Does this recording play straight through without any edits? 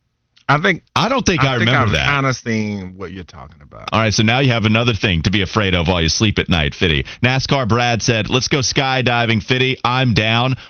no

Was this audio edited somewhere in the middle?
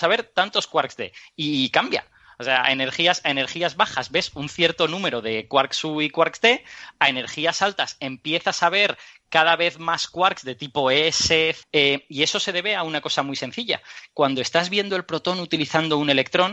yes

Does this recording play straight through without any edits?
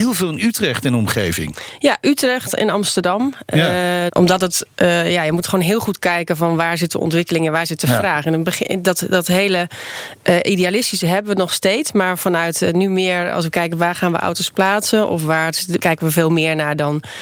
no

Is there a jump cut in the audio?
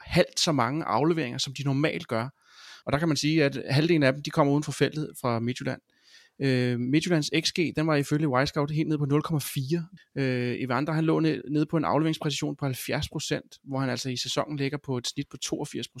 yes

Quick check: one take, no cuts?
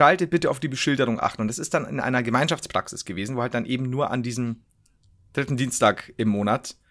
yes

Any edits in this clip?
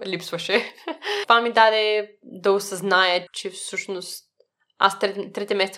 yes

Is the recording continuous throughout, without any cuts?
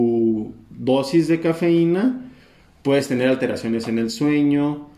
yes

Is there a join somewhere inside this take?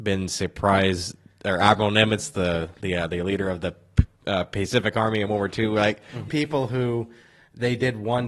yes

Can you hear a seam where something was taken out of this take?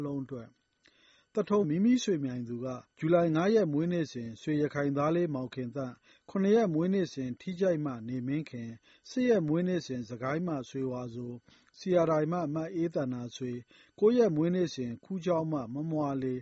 yes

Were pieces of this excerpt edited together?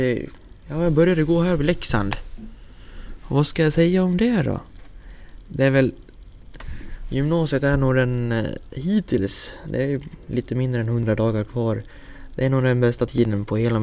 no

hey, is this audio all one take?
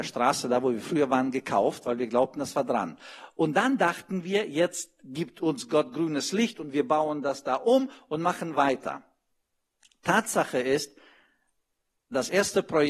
yes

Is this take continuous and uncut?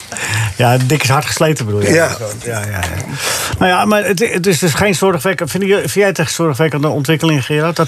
yes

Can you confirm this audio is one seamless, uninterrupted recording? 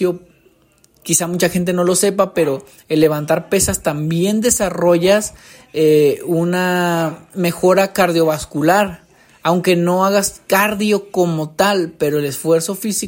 yes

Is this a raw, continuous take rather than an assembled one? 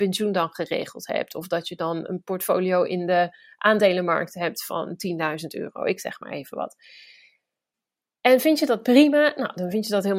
yes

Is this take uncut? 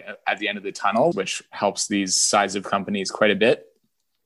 no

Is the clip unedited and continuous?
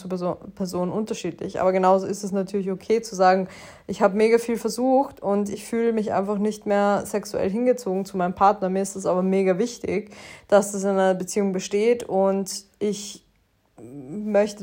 yes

